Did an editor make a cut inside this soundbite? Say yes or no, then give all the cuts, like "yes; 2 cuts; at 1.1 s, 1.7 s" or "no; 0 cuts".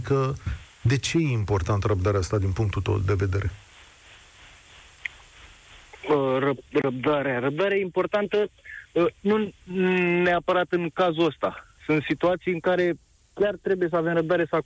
yes; 1 cut; at 11.8 s